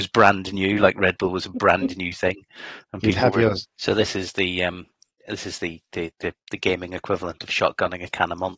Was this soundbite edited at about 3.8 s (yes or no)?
yes